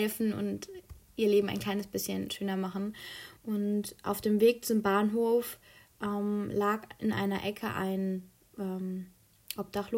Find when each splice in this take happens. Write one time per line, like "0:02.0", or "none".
none